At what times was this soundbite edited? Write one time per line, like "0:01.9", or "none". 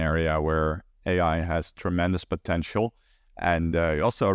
none